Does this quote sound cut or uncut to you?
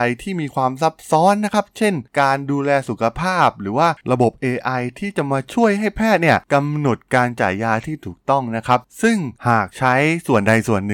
cut